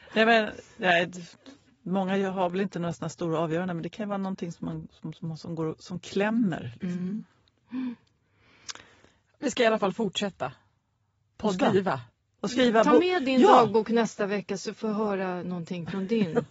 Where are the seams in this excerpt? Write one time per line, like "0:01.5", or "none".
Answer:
none